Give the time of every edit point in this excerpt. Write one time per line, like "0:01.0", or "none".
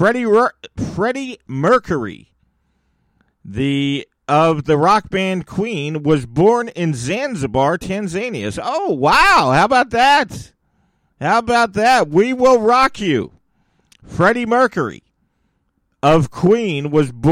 none